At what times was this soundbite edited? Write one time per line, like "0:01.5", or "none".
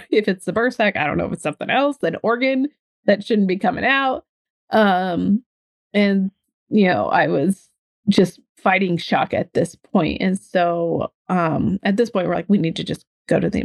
none

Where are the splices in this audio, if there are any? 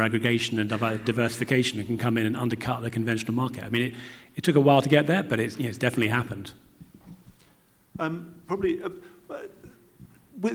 none

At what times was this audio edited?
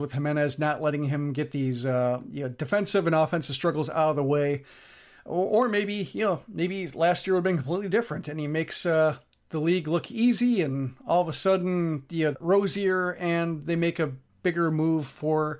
0:12.3

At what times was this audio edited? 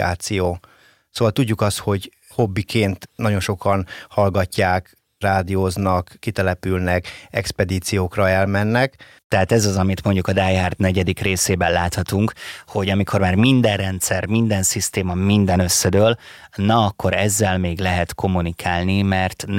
0:09.2

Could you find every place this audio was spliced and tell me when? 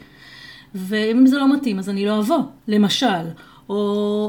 0:02.6

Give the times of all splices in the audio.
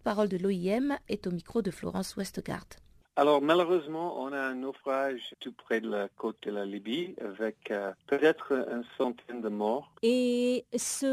0:05.3
0:10.0

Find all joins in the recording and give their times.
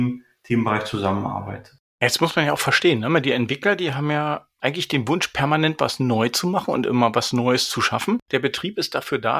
0:08.2

